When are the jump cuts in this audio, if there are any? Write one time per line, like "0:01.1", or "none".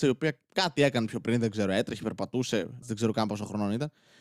0:02.8